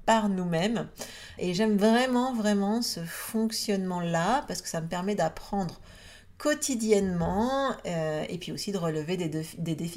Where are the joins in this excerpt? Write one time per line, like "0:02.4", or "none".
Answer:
0:01.4

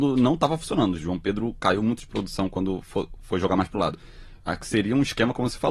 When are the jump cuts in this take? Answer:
0:01.0

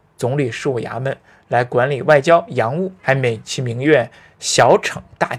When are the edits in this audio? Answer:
0:03.0

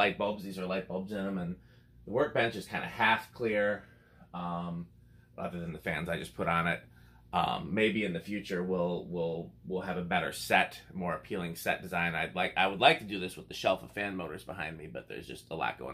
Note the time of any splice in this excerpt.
none

